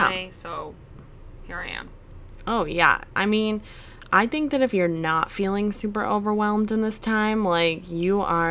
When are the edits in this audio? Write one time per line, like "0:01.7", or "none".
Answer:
none